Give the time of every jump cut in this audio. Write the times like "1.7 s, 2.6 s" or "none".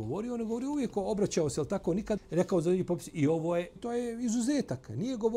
2.2 s, 3.8 s